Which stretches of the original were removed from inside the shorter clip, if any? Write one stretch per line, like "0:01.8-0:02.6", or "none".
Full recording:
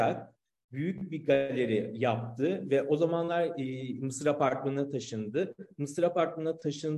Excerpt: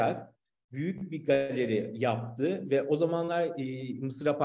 none